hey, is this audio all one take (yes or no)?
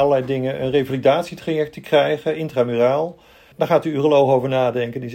no